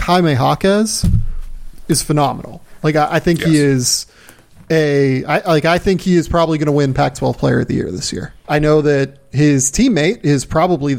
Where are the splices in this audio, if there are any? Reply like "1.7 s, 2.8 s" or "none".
8.4 s